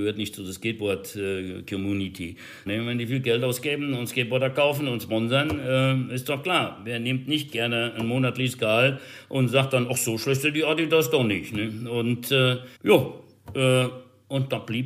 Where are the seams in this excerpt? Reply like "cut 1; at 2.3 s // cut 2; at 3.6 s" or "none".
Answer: cut 1; at 2.7 s // cut 2; at 12.8 s

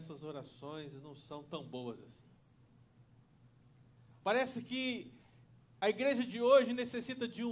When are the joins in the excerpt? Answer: cut 1; at 4.1 s

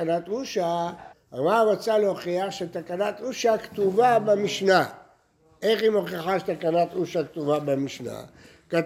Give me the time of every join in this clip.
cut 1; at 1.1 s

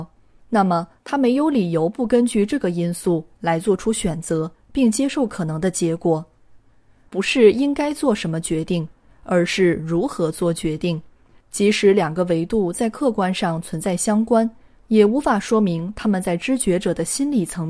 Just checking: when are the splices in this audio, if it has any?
cut 1; at 7.1 s // cut 2; at 11.3 s

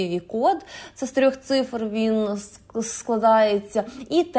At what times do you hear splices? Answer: none

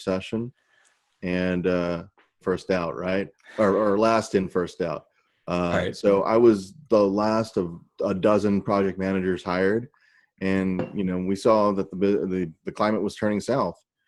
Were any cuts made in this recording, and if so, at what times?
cut 1; at 2.4 s

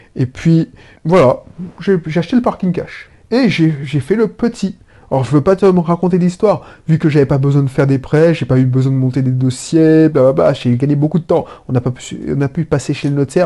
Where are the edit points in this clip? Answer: cut 1; at 1.0 s

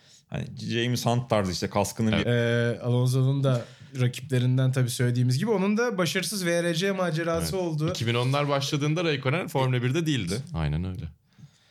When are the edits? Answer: cut 1; at 2.2 s // cut 2; at 10.3 s

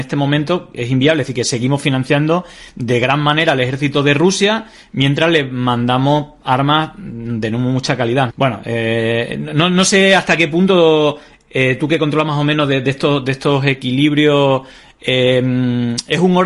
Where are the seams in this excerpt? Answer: cut 1; at 8.3 s

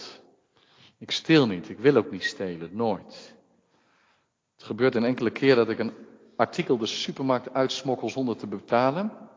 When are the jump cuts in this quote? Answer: none

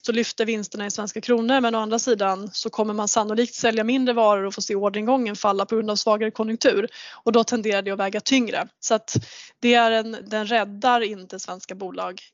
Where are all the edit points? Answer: cut 1; at 10.2 s

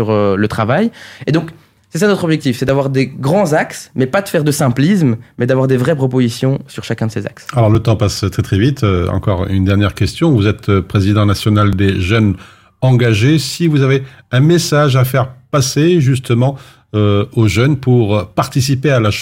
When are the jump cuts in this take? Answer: none

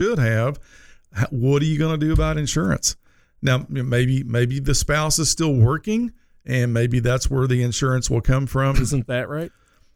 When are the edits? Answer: cut 1; at 8.7 s

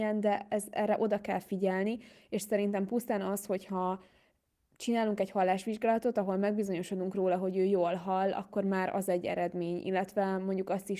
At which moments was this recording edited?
none

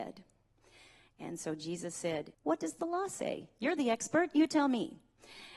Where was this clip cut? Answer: cut 1; at 1.1 s // cut 2; at 2.3 s

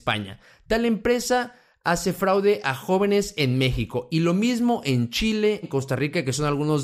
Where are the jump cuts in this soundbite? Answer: cut 1; at 5.6 s

